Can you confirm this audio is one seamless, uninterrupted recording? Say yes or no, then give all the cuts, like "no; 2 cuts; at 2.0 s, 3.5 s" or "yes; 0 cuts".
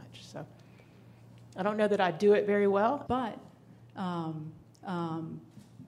no; 2 cuts; at 3.1 s, 4.8 s